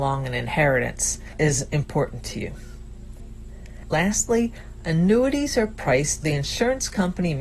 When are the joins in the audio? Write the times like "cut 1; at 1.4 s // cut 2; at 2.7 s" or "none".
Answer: cut 1; at 6.2 s